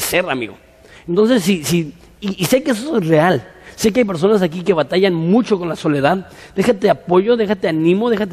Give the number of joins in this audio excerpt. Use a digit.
0